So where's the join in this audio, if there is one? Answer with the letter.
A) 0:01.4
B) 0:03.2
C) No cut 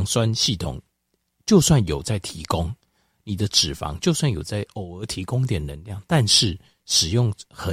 C